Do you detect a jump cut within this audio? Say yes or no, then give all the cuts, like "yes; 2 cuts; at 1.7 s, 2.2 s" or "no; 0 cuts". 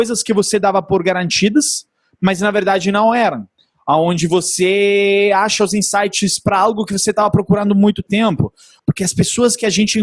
yes; 1 cut; at 8.8 s